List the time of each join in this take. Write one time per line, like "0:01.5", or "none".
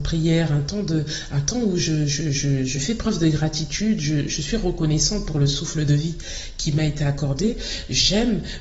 none